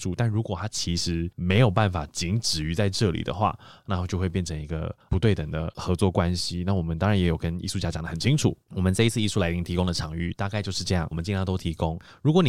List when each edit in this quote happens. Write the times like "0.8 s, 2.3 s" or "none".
8.6 s, 11.1 s

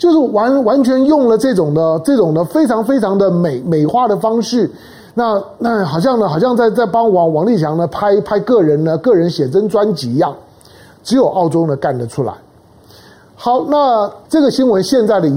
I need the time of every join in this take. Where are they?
14.2 s

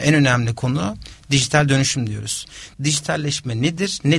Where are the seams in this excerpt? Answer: 2.7 s

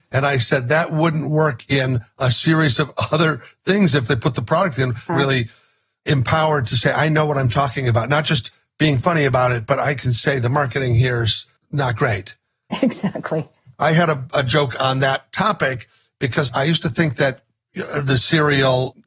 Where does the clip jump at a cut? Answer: 5.1 s, 16.5 s

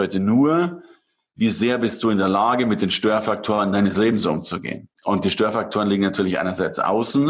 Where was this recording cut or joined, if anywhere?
4.9 s

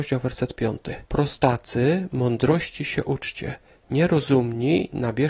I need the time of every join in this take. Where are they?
1.1 s

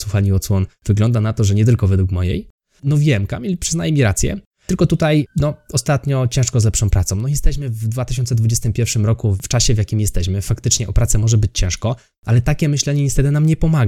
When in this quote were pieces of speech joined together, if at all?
2.8 s

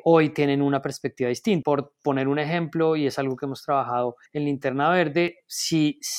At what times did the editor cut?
1.6 s, 4.3 s

